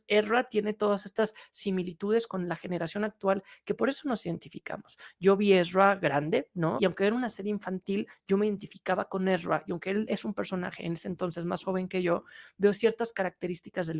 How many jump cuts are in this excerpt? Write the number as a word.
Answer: one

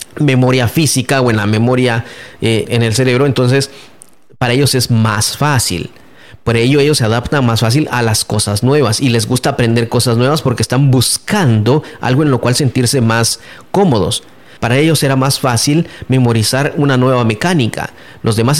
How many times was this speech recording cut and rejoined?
two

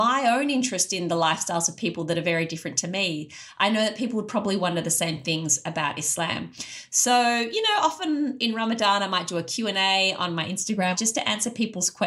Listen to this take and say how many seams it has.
zero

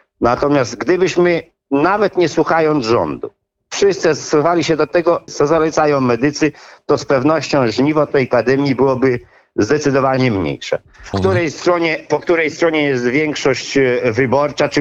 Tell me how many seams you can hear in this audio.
two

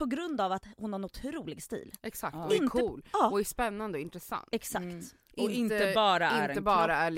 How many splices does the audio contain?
zero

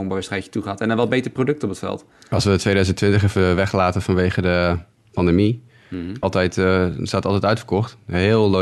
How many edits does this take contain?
two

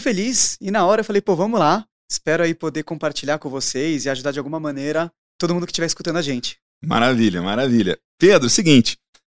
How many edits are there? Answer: zero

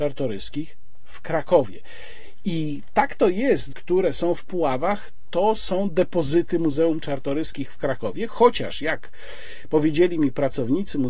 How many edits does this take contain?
one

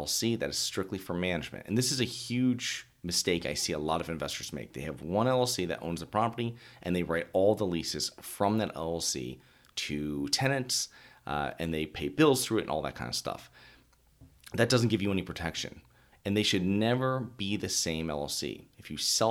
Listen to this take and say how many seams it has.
one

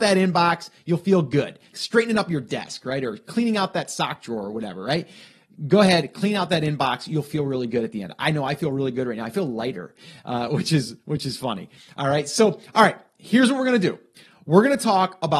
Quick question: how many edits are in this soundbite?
one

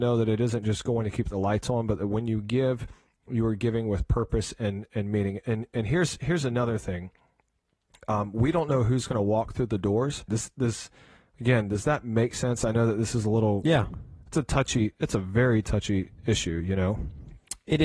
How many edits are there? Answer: one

